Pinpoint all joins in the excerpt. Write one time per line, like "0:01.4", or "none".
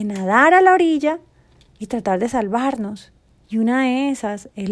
0:03.4